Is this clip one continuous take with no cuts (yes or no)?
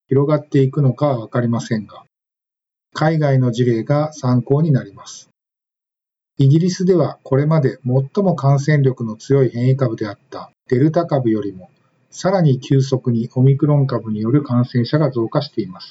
yes